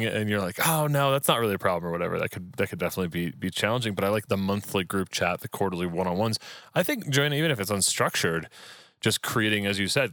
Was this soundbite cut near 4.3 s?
yes; 1 cut; at 4.3 s

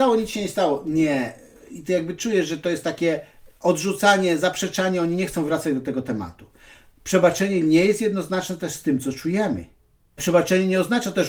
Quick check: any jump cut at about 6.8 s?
no; 1 cut; at 10.2 s

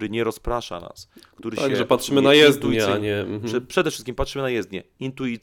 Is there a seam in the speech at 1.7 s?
no; 0 cuts

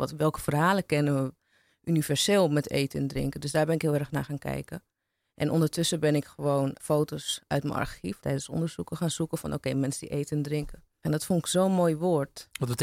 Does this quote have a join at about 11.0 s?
yes; 3 cuts; at 6.8 s, 8.2 s, 11.0 s

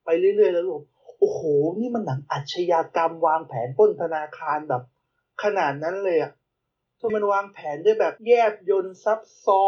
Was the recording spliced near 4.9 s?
no; 2 cuts; at 7.1 s, 8.2 s

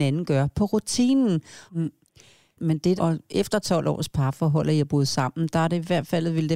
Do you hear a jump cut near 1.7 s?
yes; 2 cuts; at 1.7 s, 3.0 s

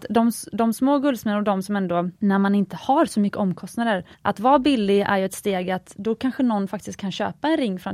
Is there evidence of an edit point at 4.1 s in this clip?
yes; 2 cuts; at 2.2 s, 4.1 s

